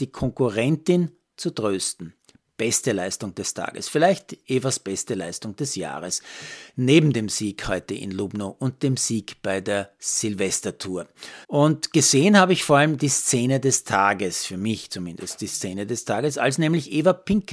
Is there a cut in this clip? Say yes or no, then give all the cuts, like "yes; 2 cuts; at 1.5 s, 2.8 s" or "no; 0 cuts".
yes; 1 cut; at 11.4 s